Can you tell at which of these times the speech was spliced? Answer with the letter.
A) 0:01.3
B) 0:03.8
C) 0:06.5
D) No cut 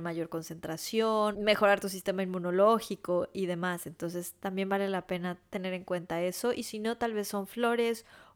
A